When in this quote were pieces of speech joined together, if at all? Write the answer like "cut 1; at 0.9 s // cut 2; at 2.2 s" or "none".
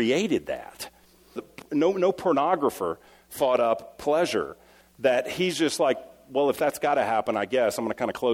cut 1; at 1.4 s // cut 2; at 4.8 s

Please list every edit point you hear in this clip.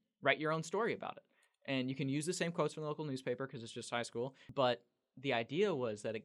none

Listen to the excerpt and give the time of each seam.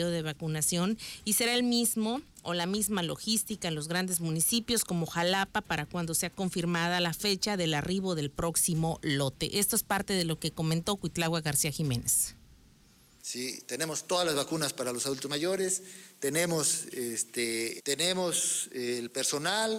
cut 1; at 13.2 s // cut 2; at 17.8 s

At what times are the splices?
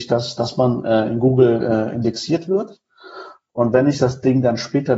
none

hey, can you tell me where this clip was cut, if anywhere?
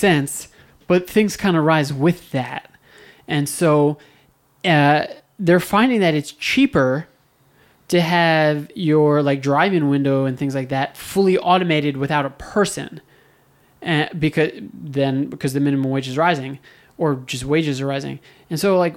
none

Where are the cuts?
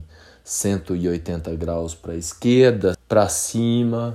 cut 1; at 2.9 s

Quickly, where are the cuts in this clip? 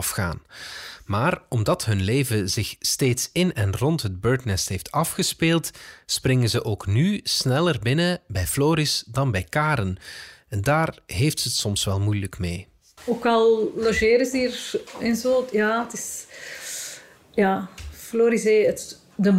cut 1; at 13.0 s

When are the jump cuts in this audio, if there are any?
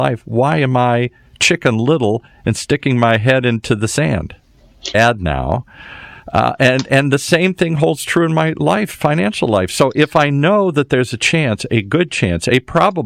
cut 1; at 4.9 s

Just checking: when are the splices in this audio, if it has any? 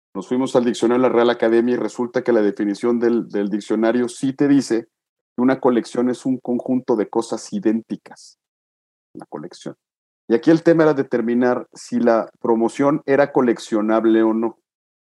cut 1; at 10.1 s

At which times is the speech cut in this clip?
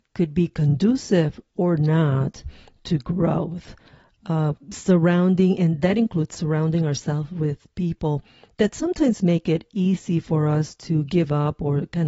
none

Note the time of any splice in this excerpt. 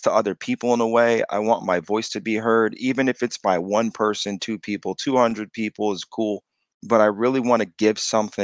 none

